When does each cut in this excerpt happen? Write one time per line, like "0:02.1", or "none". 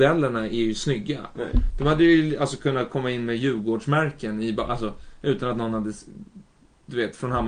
0:01.3